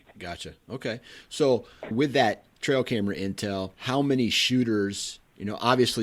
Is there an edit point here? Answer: yes; 2 cuts; at 1.9 s, 3.7 s

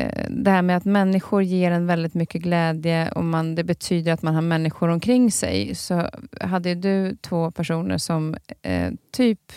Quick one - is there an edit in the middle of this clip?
no; 0 cuts

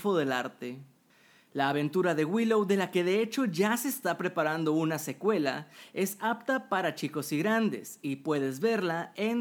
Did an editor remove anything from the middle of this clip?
no; 0 cuts

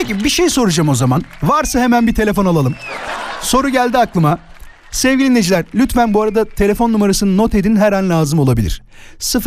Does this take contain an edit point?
no; 0 cuts

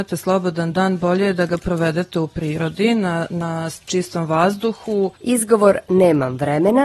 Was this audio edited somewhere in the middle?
no; 0 cuts

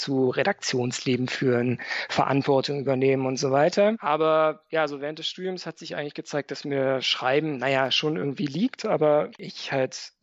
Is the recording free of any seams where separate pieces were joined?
no; 1 cut; at 3.9 s

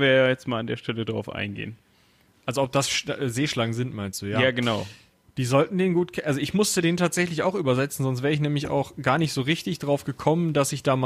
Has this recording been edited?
yes; 1 cut; at 5.2 s

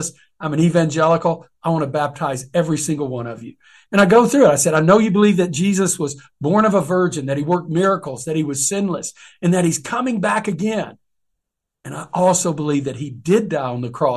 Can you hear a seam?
no; 0 cuts

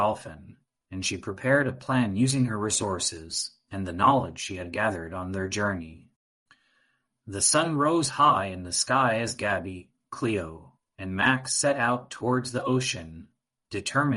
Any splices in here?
no; 0 cuts

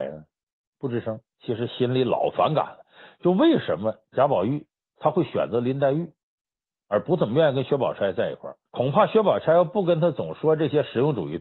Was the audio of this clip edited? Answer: yes; 1 cut; at 8.7 s

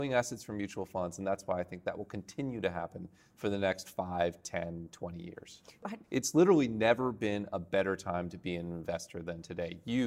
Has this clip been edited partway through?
yes; 1 cut; at 6.0 s

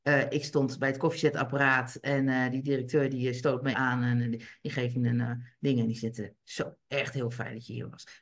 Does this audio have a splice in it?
yes; 2 cuts; at 3.7 s, 6.8 s

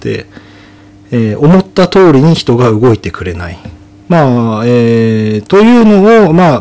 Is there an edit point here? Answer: yes; 1 cut; at 4.0 s

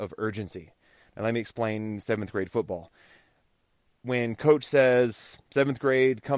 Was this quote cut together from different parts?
no; 0 cuts

